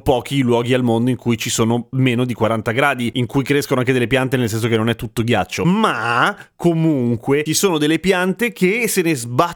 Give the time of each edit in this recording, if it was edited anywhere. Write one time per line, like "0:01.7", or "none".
none